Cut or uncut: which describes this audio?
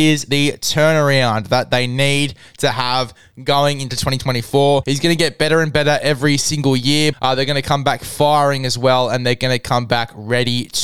cut